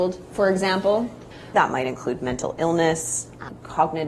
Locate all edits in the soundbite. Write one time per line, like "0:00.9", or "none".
0:01.5